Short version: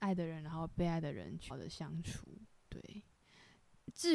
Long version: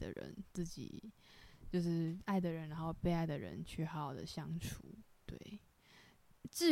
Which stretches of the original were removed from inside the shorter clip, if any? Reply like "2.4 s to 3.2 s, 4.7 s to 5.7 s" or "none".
3.8 s to 4.1 s